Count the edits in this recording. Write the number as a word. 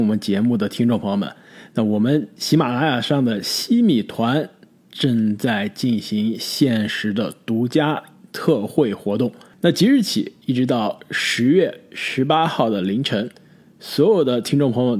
zero